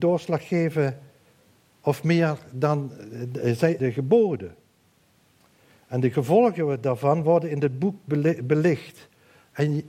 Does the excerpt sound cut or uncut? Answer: cut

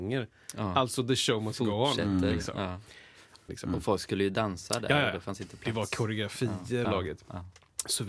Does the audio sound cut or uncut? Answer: cut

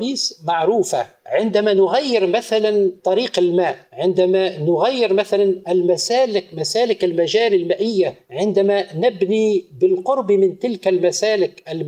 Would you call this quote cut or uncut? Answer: uncut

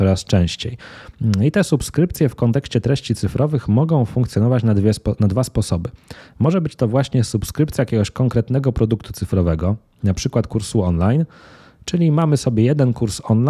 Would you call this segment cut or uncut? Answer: uncut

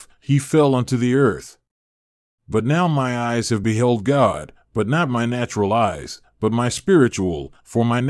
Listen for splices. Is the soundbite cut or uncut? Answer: cut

